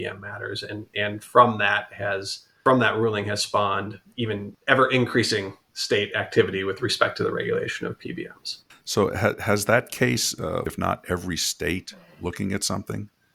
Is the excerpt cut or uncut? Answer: cut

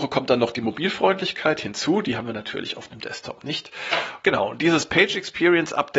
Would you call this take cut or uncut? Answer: uncut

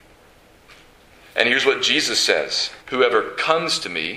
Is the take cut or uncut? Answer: cut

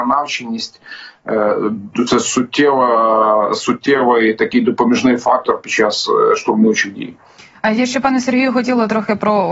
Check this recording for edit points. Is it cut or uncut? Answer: uncut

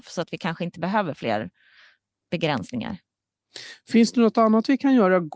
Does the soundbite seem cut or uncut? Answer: uncut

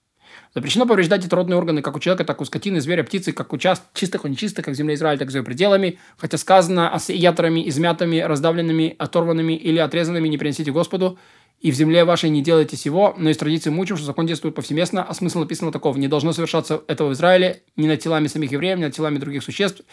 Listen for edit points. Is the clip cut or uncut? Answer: uncut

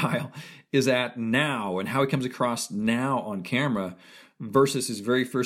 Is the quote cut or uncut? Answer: uncut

